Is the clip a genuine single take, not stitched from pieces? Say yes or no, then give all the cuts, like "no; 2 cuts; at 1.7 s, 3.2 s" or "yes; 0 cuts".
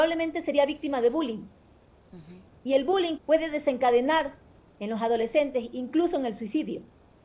no; 1 cut; at 3.2 s